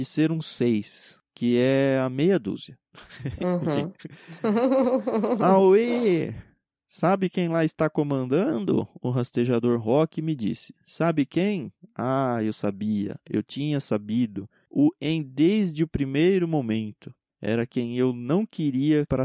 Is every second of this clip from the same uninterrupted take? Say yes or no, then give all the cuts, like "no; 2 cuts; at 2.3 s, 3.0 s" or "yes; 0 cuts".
yes; 0 cuts